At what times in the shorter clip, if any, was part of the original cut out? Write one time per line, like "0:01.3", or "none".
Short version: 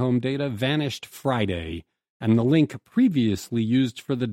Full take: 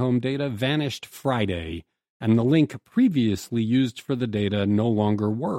none